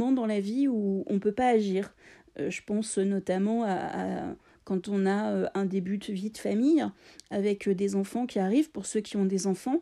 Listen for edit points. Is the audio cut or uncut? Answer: uncut